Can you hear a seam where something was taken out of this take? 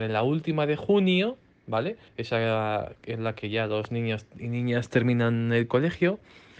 yes; 1 cut; at 2.1 s

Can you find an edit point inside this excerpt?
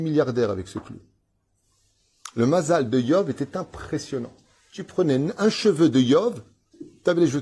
no; 0 cuts

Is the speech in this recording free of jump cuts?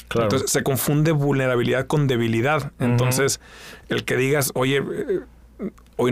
yes; 0 cuts

